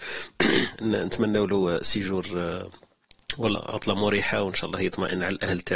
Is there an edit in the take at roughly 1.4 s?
no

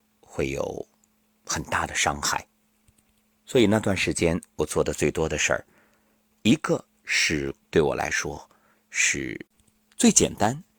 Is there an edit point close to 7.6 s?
yes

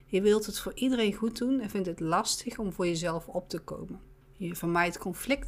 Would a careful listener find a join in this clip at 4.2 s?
yes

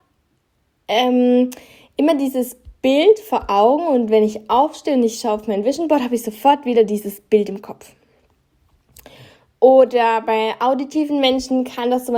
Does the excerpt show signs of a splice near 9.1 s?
no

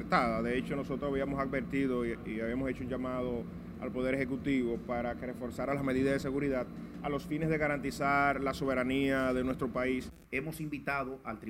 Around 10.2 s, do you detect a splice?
yes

